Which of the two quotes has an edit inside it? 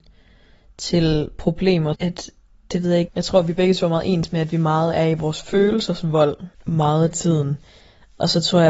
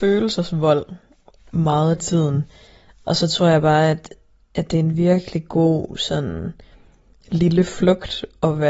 first; 3 cuts; at 1.9 s, 3.1 s, 6.5 s

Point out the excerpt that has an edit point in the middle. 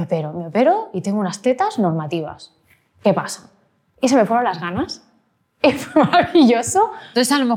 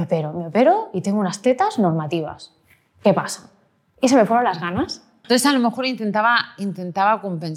second; 1 cut; at 5.2 s

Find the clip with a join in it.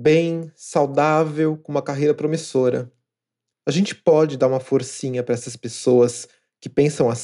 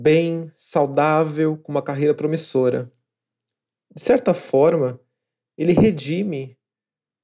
first; 1 cut; at 3.5 s

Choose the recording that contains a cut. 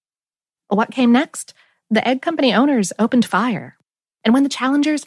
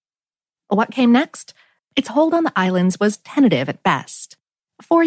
second; 1 cut; at 1.8 s

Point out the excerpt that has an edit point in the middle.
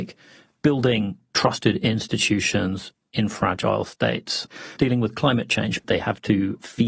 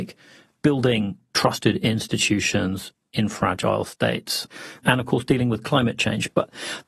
first; 2 cuts; at 4.8 s, 5.8 s

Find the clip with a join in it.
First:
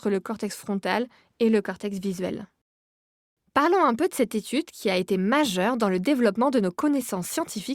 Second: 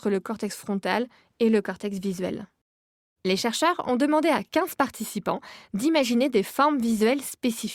second; 1 cut; at 3.2 s

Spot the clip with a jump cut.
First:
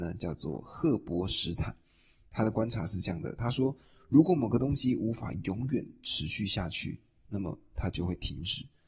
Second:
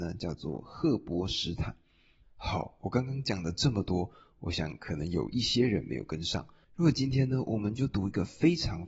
second; 2 cuts; at 2.2 s, 6.6 s

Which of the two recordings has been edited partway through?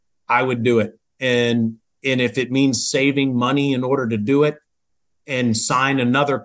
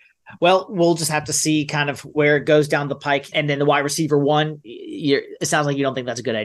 second; 1 cut; at 3.3 s

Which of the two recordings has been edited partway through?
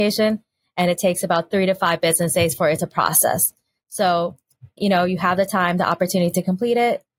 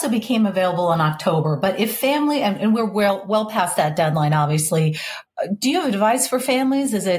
first; 1 cut; at 4.8 s

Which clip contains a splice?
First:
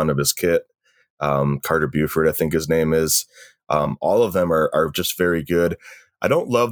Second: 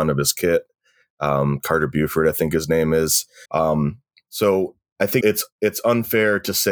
second; 2 cuts; at 3.4 s, 5.2 s

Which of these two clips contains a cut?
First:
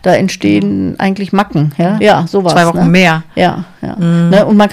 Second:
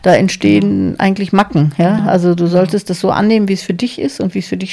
first; 1 cut; at 2.0 s

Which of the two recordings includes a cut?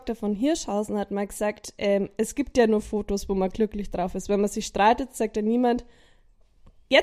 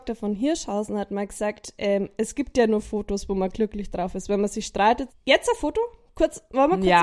second; 1 cut; at 5.1 s

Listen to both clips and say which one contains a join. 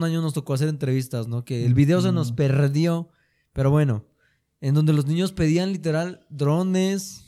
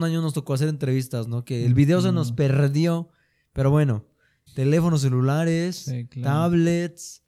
second; 1 cut; at 4.5 s

